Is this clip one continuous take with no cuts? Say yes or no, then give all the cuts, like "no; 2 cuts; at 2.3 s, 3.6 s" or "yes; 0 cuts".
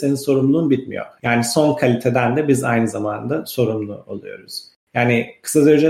no; 1 cut; at 1.2 s